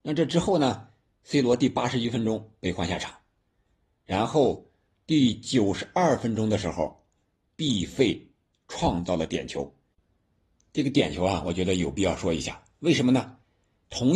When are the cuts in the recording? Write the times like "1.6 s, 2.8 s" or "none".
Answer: none